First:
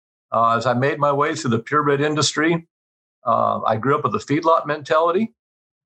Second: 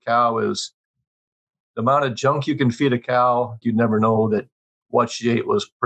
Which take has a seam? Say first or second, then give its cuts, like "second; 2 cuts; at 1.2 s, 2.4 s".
second; 1 cut; at 3.6 s